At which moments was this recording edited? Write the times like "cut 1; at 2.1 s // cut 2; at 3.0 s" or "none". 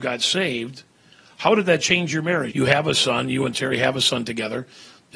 cut 1; at 2.5 s